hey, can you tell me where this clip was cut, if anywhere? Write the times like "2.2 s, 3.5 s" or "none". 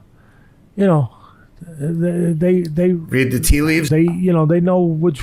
3.9 s